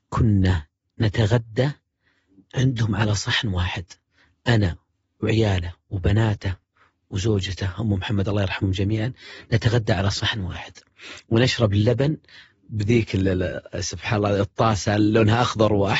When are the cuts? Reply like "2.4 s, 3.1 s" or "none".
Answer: none